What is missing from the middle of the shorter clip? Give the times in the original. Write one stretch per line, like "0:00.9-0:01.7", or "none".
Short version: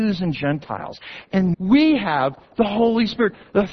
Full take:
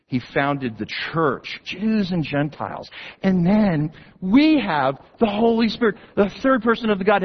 0:03.4-0:04.2